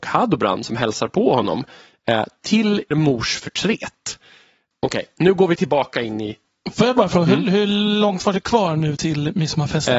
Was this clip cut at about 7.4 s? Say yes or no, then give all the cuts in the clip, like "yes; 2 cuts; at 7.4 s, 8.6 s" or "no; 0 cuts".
no; 2 cuts; at 2.9 s, 4.7 s